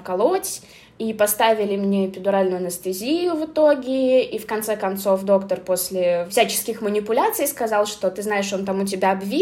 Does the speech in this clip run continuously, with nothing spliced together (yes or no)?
yes